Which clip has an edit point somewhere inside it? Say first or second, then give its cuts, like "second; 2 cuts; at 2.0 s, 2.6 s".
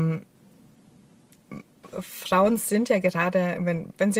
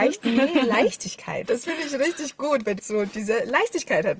second; 2 cuts; at 1.5 s, 2.8 s